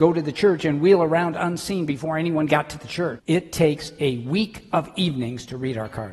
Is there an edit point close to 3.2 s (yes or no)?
yes